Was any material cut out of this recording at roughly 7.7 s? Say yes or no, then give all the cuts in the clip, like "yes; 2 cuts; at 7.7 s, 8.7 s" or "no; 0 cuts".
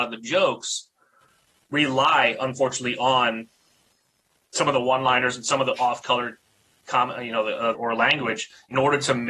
yes; 1 cut; at 7.7 s